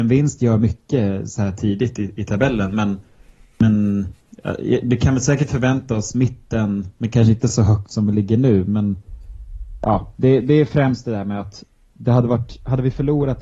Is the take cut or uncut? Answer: uncut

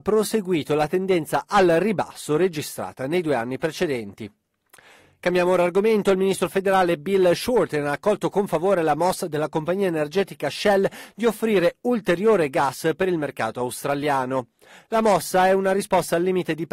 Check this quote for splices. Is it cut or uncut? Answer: uncut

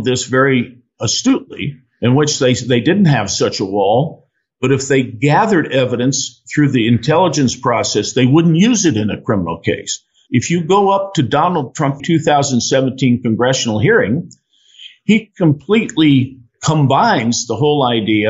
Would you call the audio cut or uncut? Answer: cut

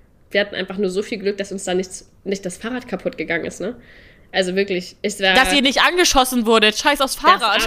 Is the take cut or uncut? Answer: uncut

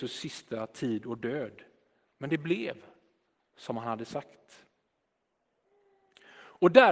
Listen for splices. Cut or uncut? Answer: uncut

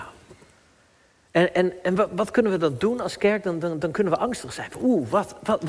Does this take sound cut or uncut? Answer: uncut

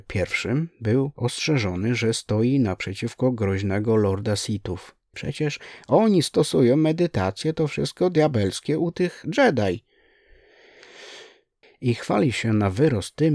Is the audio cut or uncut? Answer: cut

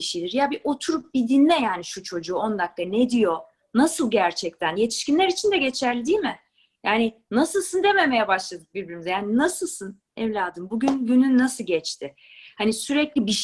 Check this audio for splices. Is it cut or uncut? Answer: uncut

